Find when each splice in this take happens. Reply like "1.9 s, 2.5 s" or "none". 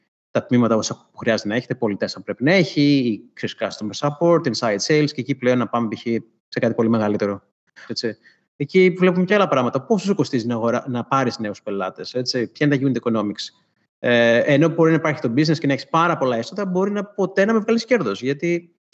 7.9 s